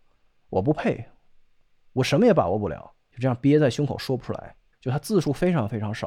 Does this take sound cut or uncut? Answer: cut